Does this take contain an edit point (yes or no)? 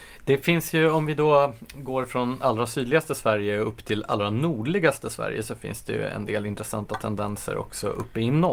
no